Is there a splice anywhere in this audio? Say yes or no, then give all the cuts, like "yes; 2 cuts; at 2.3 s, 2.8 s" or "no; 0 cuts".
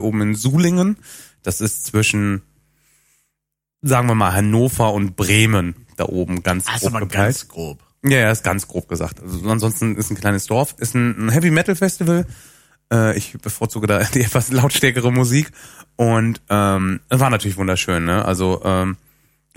no; 0 cuts